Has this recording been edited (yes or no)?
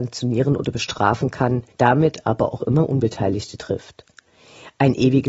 yes